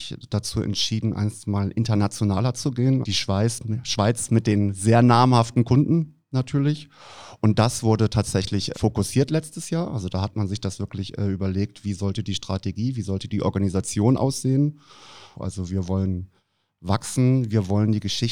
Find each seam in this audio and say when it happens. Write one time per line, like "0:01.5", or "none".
0:03.0
0:08.7
0:15.3